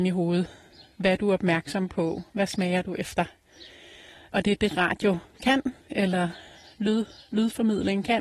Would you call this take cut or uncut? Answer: uncut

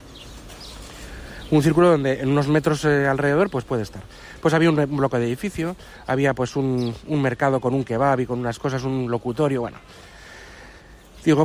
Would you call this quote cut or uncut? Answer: uncut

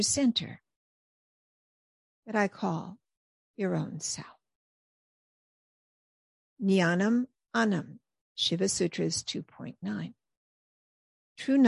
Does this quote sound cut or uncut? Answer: cut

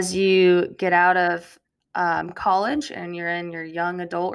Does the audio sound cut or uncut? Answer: uncut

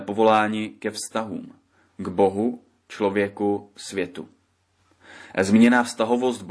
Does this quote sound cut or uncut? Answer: uncut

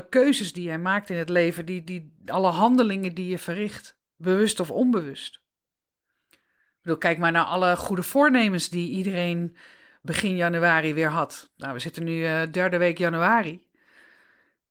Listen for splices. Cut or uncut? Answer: uncut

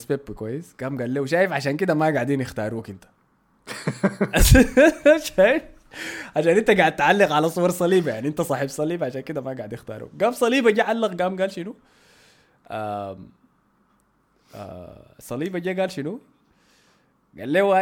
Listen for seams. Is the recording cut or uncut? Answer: uncut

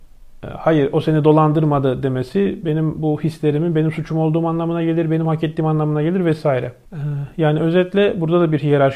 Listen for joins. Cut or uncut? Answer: uncut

